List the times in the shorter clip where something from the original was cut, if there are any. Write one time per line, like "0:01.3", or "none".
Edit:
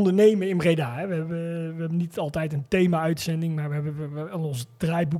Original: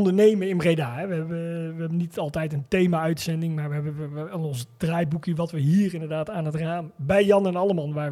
none